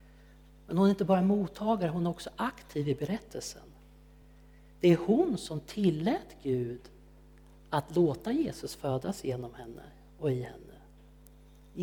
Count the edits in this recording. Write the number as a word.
zero